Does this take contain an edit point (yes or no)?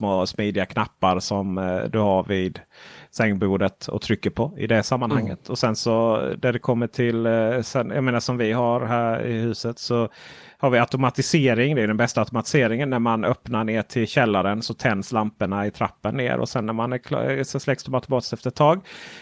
no